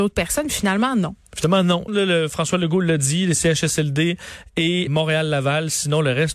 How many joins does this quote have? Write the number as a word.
two